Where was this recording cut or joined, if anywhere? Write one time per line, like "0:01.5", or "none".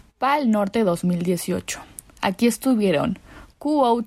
none